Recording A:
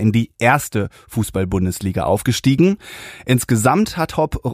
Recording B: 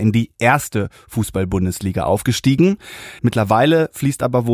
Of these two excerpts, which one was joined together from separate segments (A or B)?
B